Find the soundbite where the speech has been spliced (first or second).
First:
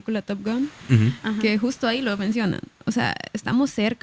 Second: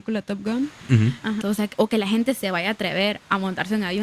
second